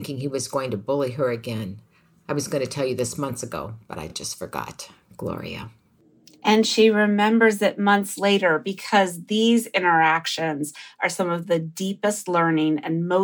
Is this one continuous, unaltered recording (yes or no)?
yes